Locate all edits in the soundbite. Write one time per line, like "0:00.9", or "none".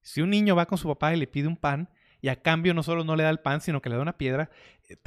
none